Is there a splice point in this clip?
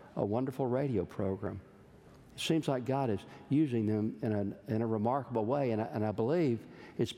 no; 0 cuts

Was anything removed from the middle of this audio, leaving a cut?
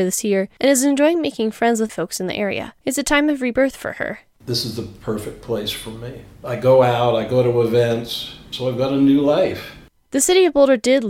yes; 1 cut; at 2.8 s

